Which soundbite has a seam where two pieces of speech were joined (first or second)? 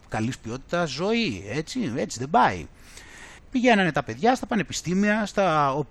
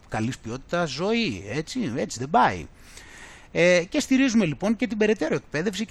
first